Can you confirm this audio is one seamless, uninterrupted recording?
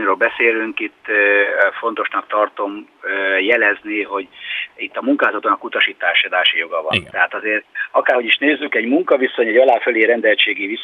yes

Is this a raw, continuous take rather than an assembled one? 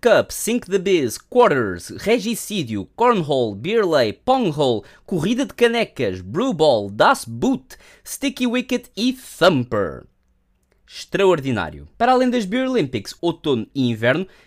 no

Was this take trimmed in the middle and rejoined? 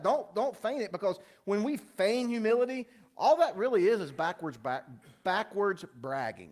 no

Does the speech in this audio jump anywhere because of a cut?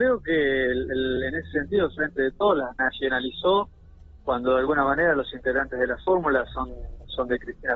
no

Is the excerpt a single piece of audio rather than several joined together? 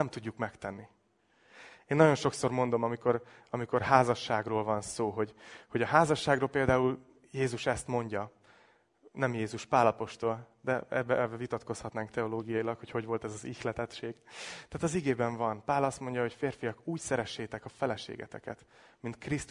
yes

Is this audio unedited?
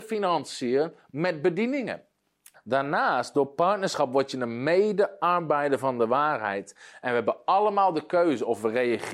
no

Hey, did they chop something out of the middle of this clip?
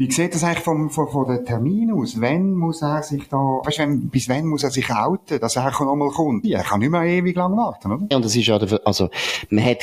yes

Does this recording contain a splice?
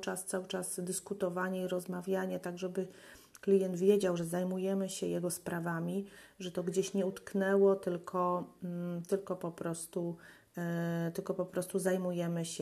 no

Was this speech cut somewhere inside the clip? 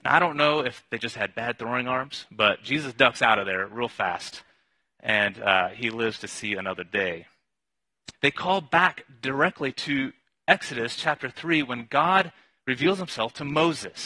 yes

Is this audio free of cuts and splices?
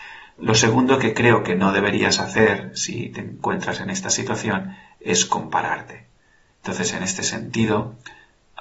yes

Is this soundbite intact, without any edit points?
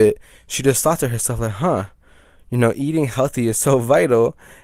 yes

